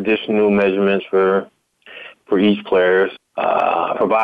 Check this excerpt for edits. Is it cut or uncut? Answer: cut